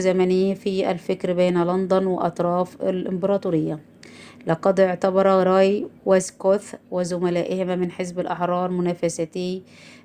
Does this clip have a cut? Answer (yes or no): yes